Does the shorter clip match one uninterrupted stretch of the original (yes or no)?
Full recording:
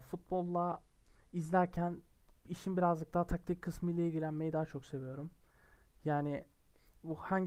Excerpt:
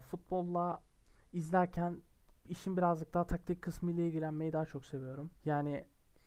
no